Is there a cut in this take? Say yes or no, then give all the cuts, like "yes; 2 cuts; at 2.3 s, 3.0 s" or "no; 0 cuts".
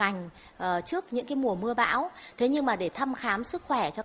no; 0 cuts